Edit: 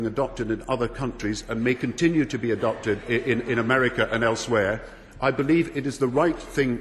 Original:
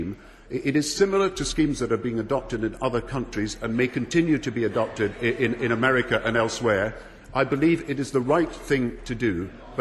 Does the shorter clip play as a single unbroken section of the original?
yes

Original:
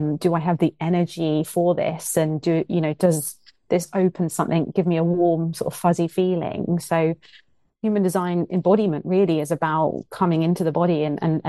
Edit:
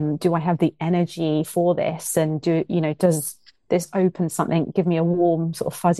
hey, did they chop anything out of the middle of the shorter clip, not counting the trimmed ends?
no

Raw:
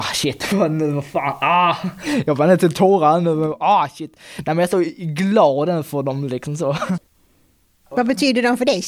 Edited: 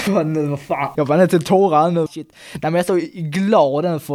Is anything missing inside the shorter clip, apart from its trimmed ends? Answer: yes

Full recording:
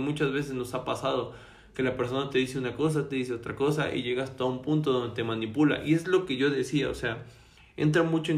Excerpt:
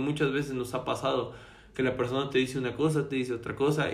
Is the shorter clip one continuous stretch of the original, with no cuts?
yes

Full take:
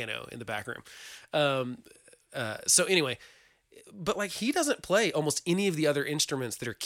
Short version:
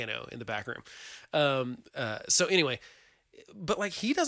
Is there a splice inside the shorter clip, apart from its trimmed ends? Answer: yes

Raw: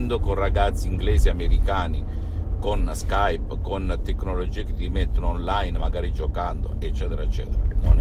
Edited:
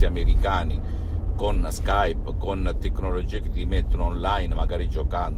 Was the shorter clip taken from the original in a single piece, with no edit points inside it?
yes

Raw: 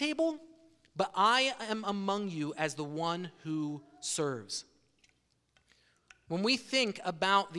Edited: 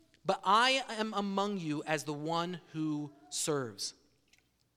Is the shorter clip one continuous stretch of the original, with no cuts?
yes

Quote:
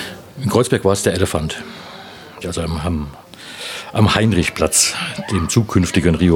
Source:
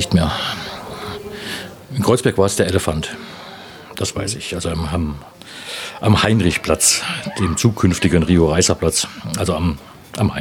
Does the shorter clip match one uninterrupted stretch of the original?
no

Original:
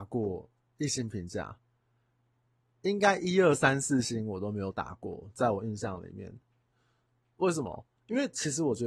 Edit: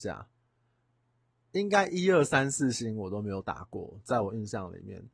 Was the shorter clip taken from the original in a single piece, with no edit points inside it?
yes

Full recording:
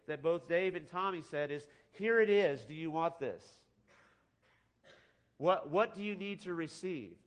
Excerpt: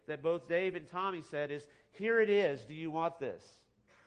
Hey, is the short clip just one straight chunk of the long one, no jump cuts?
yes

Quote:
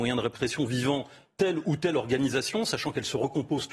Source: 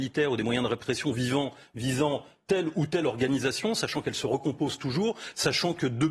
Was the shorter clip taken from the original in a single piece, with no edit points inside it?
no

